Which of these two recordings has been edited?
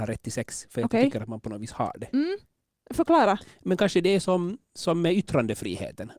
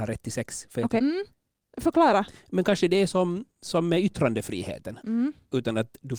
second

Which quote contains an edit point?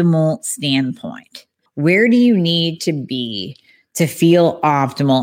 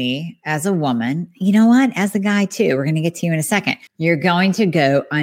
second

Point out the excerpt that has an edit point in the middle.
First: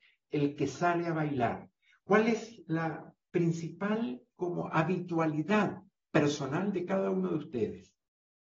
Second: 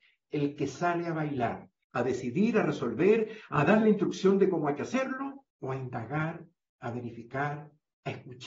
second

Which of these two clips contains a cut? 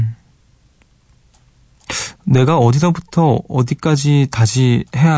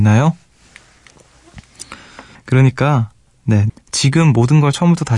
second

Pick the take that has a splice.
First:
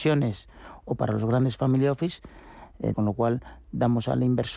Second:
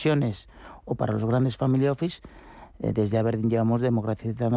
first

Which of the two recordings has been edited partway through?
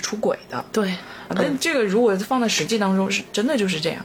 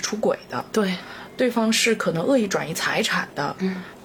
first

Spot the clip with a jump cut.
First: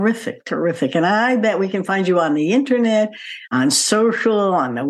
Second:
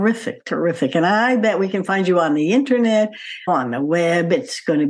second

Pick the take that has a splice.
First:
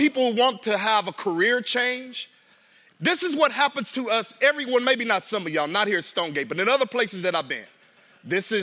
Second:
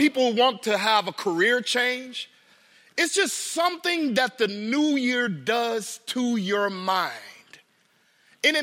first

